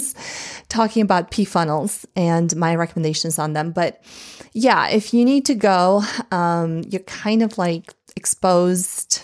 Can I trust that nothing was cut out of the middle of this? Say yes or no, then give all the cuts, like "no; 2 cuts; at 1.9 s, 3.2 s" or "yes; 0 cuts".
yes; 0 cuts